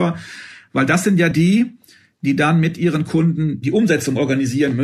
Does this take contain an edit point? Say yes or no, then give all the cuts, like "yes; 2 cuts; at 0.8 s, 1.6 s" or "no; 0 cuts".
no; 0 cuts